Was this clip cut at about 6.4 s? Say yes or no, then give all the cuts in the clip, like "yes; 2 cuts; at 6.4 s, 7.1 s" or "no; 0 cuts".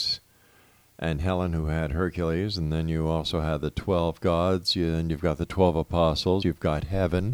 yes; 1 cut; at 6.4 s